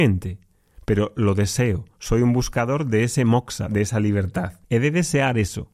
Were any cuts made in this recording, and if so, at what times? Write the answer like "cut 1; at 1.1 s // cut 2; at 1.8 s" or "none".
cut 1; at 4.6 s